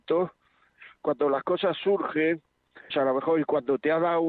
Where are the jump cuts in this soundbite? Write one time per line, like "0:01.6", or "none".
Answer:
0:02.9